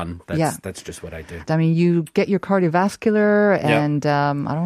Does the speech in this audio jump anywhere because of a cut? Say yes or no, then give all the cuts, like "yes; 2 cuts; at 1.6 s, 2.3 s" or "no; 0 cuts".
yes; 1 cut; at 1.5 s